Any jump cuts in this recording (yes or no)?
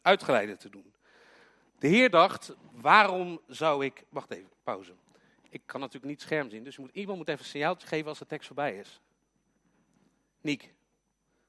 no